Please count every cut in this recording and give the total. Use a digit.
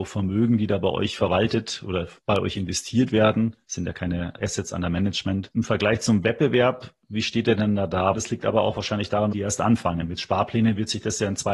3